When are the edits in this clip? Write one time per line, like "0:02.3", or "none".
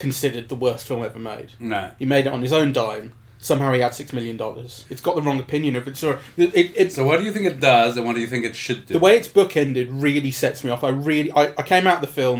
0:04.8